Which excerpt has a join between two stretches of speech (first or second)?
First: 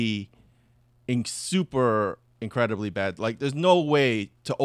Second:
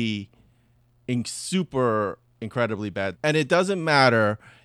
second